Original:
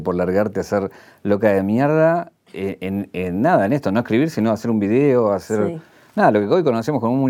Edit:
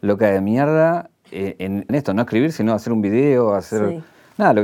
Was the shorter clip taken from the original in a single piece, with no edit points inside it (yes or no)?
no